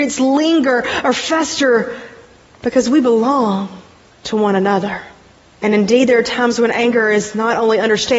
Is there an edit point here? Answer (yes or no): yes